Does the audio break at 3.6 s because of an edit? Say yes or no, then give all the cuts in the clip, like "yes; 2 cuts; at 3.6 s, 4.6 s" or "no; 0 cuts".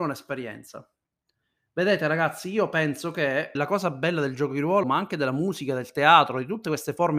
yes; 2 cuts; at 3.6 s, 4.8 s